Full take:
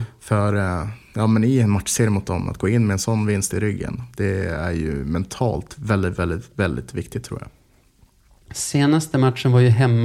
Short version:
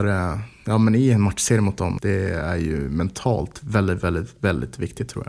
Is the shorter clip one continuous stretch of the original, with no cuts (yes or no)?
no